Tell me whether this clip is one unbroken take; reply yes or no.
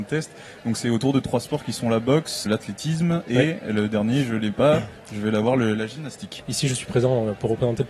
no